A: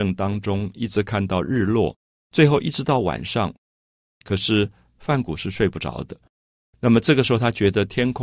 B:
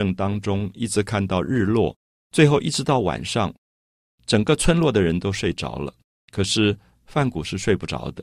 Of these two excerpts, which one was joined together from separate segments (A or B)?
A